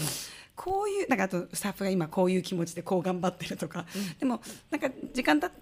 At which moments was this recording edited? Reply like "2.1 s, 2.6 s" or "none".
none